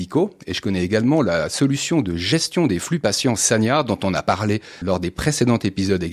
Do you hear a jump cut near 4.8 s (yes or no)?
yes